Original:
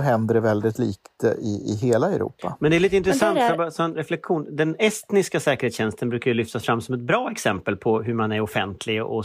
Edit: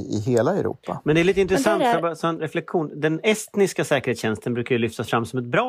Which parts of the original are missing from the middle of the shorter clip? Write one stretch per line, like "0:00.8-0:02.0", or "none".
none